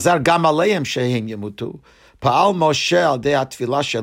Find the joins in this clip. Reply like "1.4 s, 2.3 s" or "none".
none